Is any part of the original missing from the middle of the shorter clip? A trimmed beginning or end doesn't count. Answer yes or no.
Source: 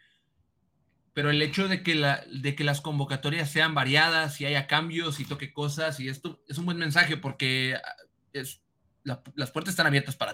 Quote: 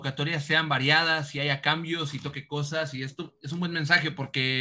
no